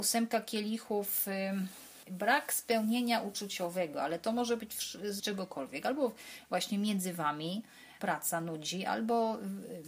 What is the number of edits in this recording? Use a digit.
2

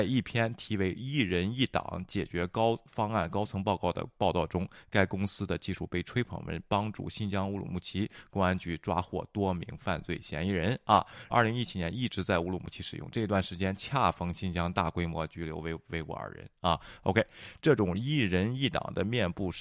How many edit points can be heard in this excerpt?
1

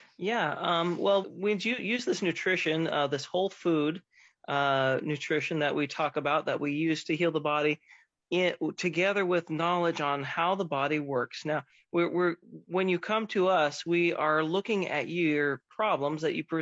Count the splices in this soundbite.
1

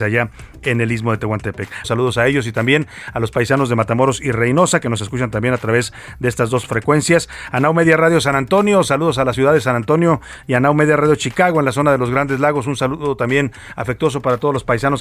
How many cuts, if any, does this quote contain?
2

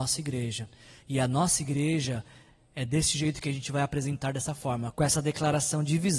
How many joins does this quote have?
1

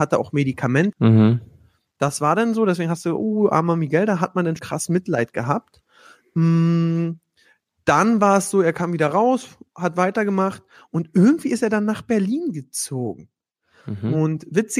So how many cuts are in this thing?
2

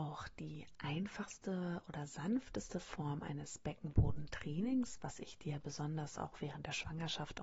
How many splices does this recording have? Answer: 0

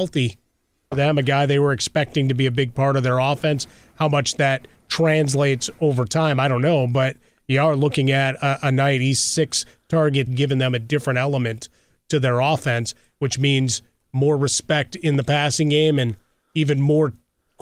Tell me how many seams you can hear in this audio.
2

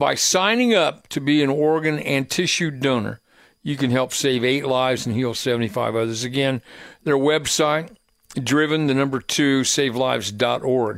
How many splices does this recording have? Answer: 0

